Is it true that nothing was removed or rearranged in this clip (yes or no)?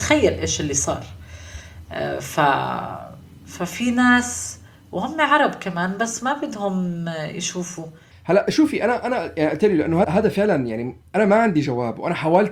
no